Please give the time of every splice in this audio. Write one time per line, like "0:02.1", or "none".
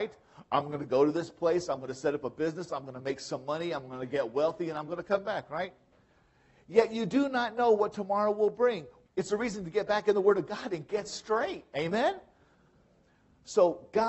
0:09.1